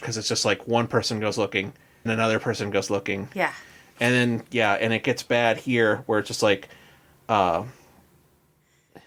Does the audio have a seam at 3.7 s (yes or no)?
no